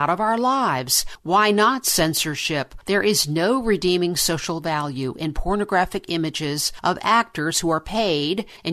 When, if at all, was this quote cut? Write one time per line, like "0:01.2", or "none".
0:02.8